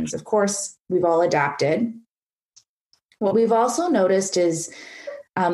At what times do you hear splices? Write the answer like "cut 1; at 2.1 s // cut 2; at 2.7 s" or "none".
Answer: none